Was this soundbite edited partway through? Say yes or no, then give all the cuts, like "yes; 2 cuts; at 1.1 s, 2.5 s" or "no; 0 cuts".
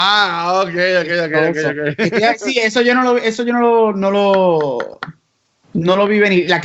no; 0 cuts